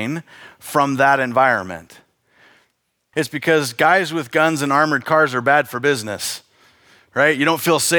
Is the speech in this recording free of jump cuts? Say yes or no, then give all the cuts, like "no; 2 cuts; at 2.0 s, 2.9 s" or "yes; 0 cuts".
no; 1 cut; at 3.1 s